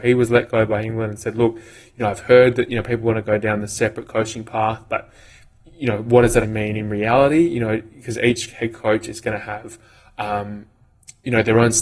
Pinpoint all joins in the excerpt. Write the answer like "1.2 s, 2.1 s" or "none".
6.4 s